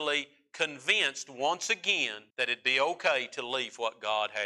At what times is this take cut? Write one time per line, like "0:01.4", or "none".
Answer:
0:02.3